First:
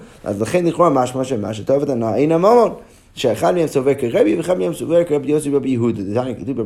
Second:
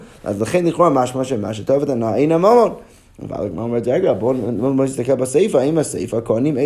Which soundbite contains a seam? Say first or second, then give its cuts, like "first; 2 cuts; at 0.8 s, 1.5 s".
first; 1 cut; at 3.1 s